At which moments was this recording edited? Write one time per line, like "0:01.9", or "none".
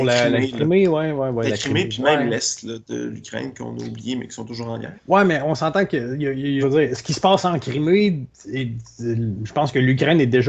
0:04.9
0:06.6
0:08.3

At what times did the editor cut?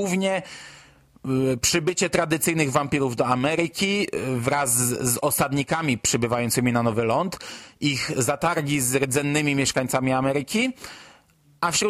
none

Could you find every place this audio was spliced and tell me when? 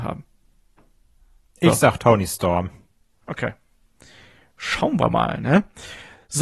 none

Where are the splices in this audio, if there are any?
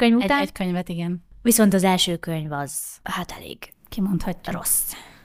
none

